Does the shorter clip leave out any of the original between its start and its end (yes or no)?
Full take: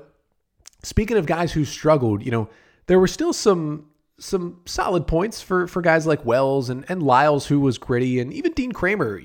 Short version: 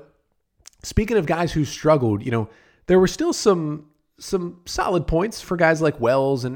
yes